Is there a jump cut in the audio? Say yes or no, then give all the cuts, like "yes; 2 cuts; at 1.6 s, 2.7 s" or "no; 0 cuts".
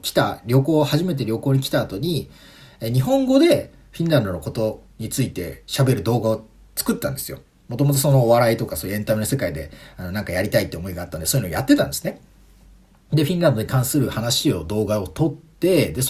no; 0 cuts